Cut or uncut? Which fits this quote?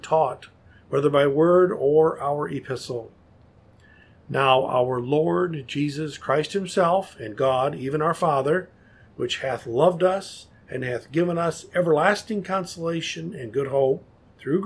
uncut